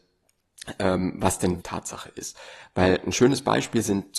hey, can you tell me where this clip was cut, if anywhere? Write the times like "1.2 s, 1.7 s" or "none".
1.6 s

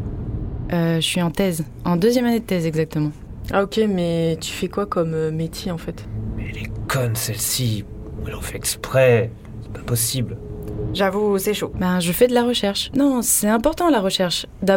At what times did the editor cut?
11.7 s, 12.9 s

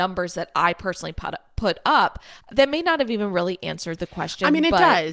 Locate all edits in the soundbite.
2.4 s

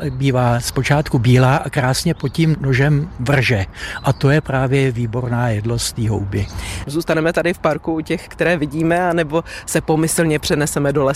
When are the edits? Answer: 6.8 s

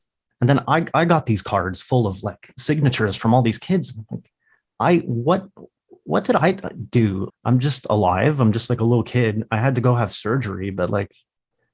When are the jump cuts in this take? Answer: 7.3 s

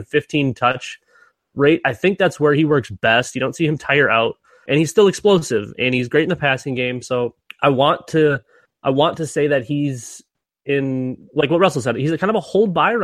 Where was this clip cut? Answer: 4.7 s

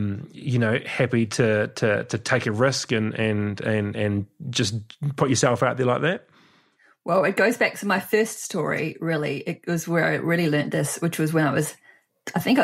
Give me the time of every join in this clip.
none

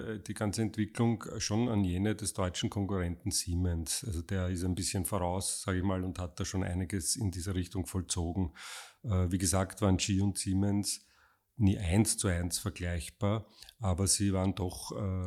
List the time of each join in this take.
none

